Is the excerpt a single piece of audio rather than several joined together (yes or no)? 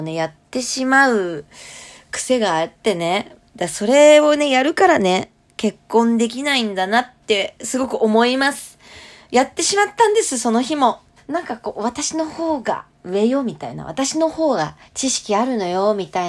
no